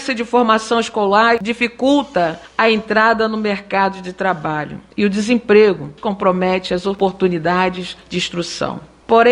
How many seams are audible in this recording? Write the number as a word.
one